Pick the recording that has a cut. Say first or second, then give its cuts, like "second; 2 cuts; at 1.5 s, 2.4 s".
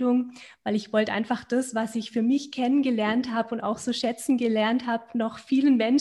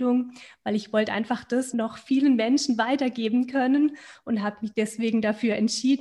second; 1 cut; at 1.7 s